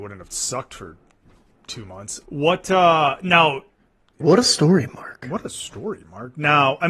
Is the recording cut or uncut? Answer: cut